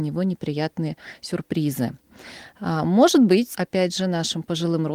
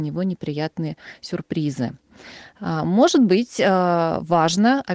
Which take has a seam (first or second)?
first